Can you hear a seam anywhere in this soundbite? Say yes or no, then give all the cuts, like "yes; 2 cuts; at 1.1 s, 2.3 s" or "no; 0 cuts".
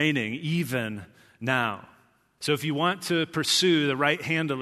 yes; 1 cut; at 2.4 s